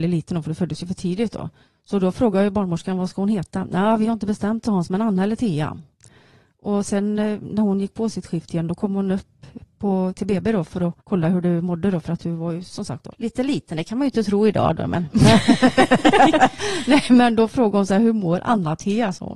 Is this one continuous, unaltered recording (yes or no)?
no